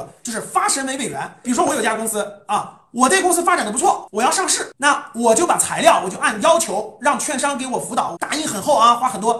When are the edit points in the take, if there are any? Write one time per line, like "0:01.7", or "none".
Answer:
0:08.2